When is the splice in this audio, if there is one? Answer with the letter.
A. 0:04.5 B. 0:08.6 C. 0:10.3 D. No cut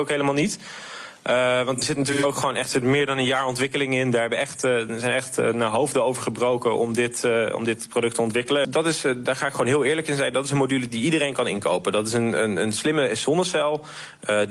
B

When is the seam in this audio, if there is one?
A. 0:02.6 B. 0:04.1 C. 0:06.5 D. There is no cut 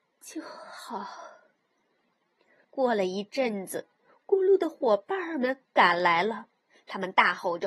A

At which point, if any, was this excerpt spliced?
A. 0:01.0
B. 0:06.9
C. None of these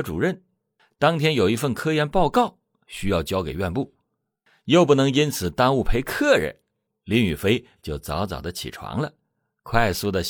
B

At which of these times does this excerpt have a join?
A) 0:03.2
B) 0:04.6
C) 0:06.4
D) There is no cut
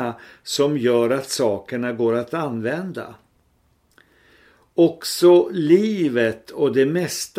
D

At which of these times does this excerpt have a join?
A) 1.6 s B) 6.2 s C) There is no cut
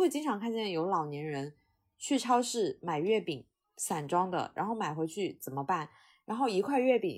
C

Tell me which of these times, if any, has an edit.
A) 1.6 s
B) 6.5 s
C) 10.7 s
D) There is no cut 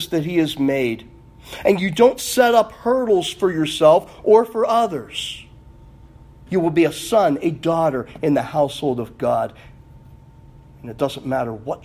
B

